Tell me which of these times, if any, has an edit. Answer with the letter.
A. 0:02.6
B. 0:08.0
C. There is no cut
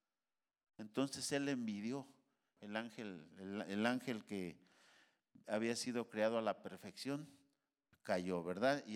A